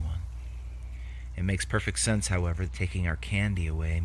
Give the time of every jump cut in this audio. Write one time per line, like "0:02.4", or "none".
0:02.7